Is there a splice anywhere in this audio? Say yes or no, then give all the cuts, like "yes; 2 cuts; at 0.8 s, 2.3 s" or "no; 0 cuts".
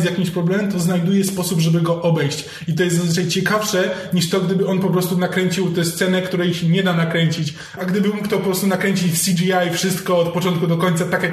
yes; 1 cut; at 7.8 s